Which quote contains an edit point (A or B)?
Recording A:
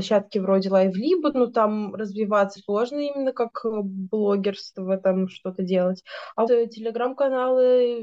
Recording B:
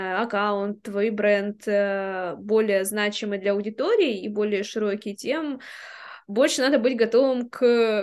A